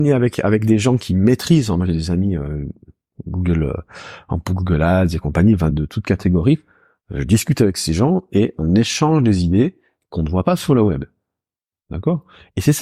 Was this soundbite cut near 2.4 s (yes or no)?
no